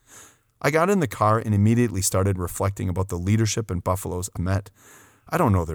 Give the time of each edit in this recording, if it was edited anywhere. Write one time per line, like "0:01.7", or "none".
0:04.4